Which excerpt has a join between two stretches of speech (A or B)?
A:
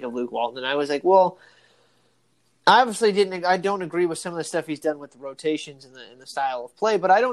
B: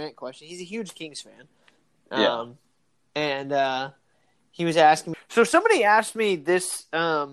B